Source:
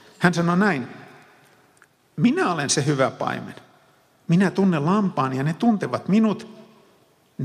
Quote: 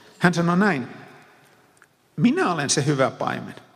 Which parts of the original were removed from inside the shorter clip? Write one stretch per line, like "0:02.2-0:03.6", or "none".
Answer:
none